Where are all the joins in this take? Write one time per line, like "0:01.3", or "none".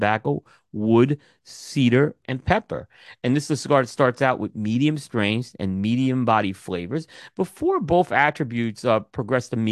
0:02.2

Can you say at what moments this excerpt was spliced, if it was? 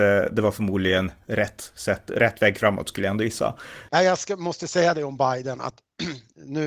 0:03.9

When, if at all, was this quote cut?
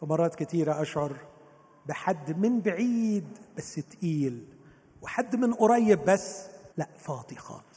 0:06.7

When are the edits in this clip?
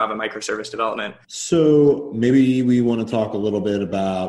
0:01.3

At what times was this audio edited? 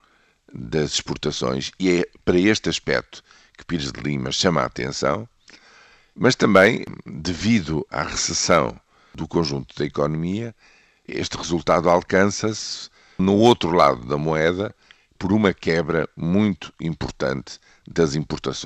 none

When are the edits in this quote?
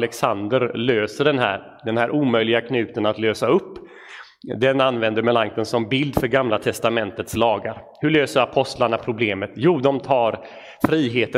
none

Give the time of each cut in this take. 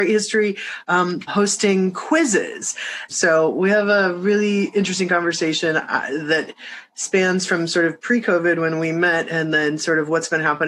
0:01.3
0:03.1

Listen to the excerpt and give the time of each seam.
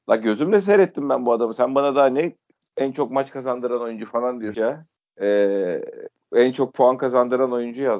0:04.5

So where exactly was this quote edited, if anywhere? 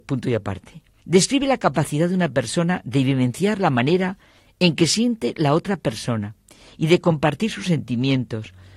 0:01.0

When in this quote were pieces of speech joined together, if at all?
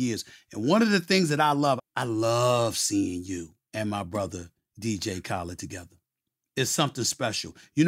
0:01.8
0:03.6

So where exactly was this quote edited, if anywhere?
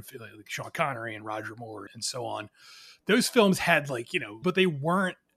0:01.9
0:04.4

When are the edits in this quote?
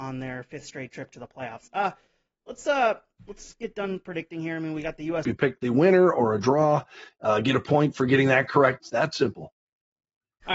0:05.2
0:08.8

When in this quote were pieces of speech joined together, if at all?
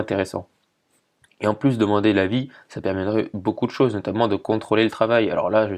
none

